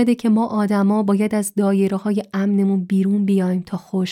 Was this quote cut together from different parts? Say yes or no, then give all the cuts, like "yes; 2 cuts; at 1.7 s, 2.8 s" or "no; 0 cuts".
no; 0 cuts